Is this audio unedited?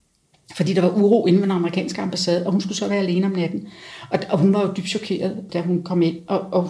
no; 1 cut; at 5.5 s

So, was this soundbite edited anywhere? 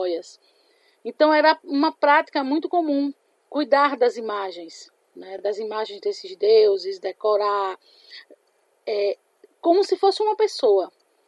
no; 0 cuts

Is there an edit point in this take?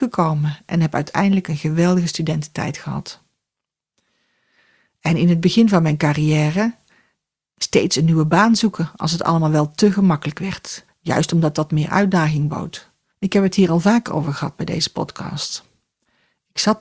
yes; 2 cuts; at 10.9 s, 13.1 s

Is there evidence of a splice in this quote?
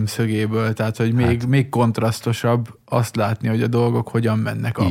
no; 0 cuts

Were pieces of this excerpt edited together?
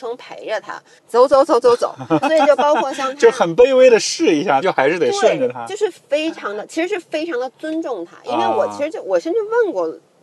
yes; 3 cuts; at 1.0 s, 2.2 s, 4.6 s

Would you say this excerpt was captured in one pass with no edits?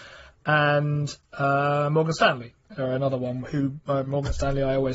yes; 0 cuts

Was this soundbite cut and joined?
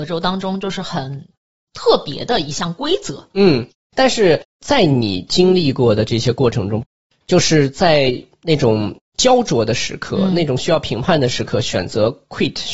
no; 0 cuts

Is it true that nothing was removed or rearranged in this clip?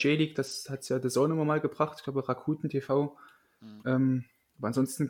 no; 1 cut; at 3.8 s

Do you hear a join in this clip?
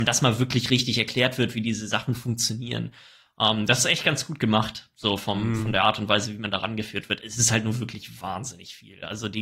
no; 0 cuts

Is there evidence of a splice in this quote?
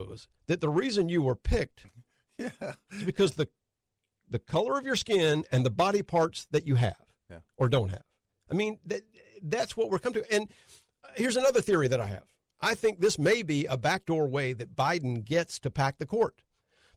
no; 0 cuts

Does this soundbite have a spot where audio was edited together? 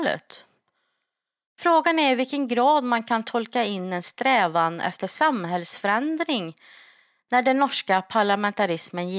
no; 0 cuts

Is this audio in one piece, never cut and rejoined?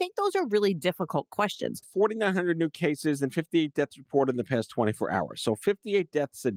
no; 1 cut; at 1.8 s

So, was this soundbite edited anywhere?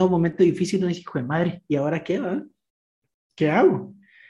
no; 0 cuts

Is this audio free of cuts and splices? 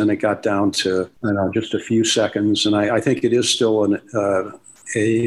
yes; 0 cuts

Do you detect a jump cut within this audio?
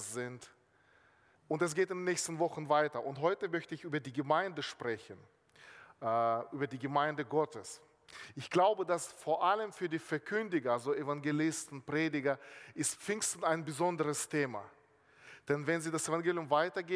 yes; 1 cut; at 1.3 s

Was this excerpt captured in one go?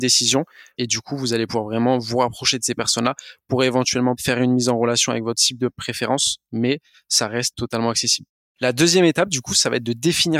no; 1 cut; at 8.4 s

